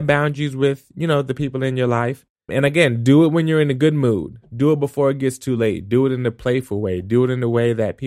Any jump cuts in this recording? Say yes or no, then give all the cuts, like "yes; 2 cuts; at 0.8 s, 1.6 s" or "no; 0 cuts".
yes; 1 cut; at 2.5 s